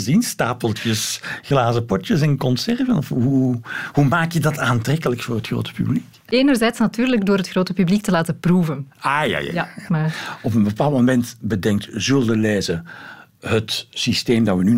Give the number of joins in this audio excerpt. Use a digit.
1